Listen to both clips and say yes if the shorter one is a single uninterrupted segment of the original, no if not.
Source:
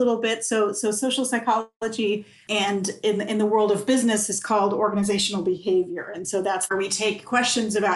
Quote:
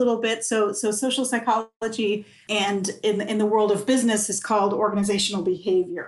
yes